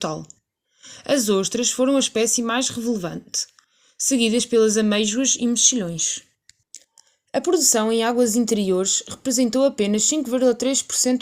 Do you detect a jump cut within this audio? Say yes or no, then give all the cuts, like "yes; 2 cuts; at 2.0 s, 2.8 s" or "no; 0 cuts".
no; 0 cuts